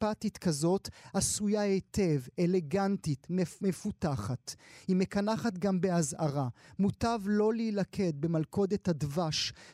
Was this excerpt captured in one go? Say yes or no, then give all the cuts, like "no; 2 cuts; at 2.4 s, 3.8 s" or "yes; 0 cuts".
yes; 0 cuts